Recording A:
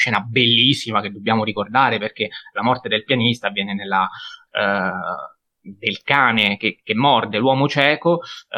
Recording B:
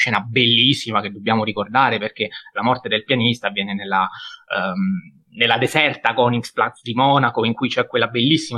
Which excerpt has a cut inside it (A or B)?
A